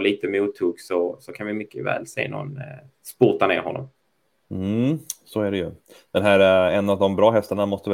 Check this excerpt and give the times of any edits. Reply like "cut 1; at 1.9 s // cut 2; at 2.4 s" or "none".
none